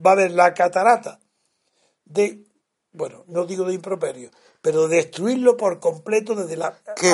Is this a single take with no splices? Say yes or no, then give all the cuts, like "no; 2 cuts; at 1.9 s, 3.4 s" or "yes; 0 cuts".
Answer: yes; 0 cuts